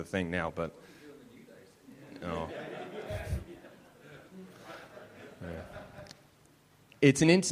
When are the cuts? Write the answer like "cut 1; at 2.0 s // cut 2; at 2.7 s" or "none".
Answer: none